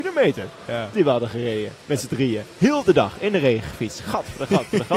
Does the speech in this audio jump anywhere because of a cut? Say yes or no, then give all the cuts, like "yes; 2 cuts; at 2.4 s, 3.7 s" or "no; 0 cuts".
no; 0 cuts